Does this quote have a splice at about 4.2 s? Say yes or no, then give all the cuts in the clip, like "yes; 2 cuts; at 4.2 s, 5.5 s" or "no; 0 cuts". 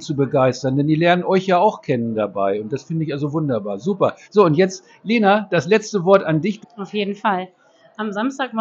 yes; 2 cuts; at 4.2 s, 6.6 s